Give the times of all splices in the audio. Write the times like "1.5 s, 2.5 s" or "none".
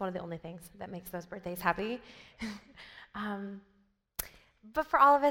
none